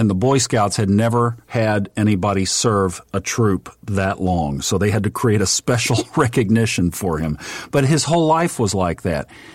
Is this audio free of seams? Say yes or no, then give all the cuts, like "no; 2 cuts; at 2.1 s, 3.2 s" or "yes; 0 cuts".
yes; 0 cuts